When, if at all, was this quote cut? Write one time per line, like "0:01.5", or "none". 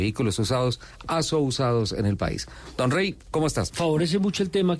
0:03.7